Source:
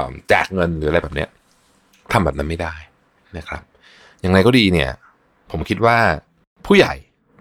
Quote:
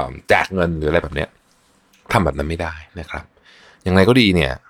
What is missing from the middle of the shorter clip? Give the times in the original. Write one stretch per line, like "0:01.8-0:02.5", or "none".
0:02.9-0:03.3

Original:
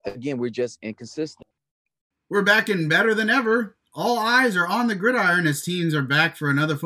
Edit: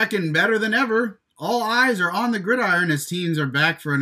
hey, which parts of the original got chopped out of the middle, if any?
none

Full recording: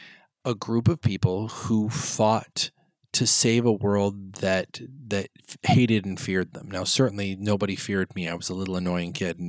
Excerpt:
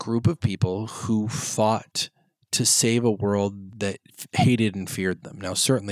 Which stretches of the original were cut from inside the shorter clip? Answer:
0:04.3-0:05.0

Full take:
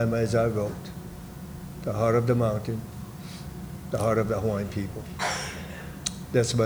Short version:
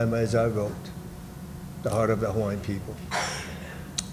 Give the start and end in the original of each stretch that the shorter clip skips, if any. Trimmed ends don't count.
0:01.7-0:03.8

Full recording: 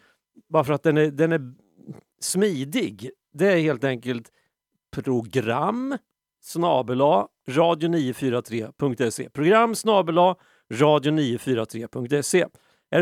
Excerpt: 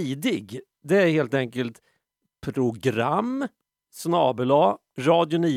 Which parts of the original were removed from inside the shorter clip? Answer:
none

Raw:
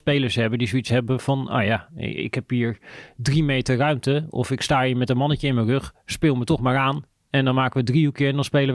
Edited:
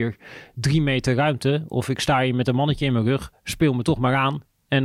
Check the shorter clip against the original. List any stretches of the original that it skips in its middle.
none

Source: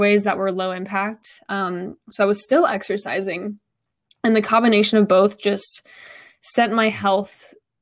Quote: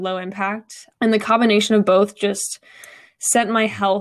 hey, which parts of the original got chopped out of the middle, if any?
0:01.4-0:04.1

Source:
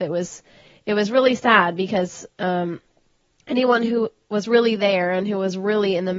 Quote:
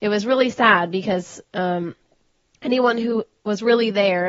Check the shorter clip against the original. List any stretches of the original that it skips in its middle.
none

